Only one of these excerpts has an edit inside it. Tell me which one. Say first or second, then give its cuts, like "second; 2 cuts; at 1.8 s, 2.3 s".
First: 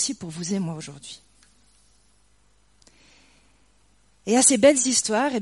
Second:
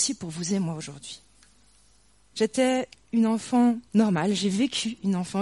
second; 2 cuts; at 2.3 s, 3.9 s